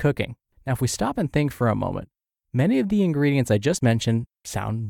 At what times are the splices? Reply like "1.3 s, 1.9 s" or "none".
none